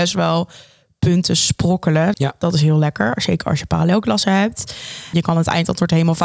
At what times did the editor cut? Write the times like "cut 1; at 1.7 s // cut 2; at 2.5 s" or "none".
cut 1; at 2.1 s // cut 2; at 5.1 s